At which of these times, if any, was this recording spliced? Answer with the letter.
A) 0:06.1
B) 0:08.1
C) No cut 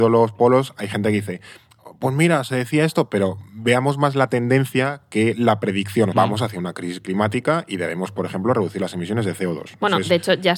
A